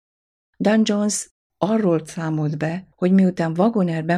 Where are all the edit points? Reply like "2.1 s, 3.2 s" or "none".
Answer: 2.9 s